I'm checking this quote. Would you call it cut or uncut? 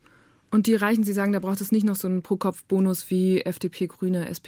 uncut